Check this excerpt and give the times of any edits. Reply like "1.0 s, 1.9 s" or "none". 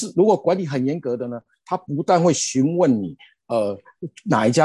none